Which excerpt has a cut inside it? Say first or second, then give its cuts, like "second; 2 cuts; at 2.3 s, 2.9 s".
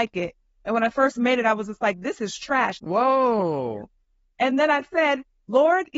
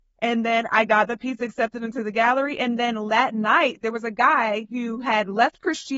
first; 1 cut; at 2.8 s